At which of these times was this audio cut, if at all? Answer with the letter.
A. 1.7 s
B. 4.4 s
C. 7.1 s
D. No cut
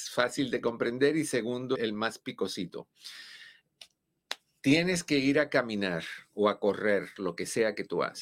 A